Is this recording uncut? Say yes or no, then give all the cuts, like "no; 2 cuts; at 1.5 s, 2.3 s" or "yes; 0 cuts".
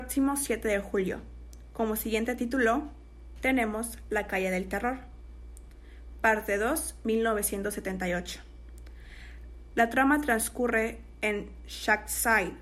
no; 1 cut; at 9.7 s